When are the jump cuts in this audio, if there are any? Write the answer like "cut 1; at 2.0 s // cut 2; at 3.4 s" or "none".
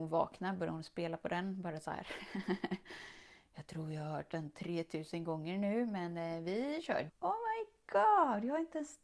cut 1; at 7.1 s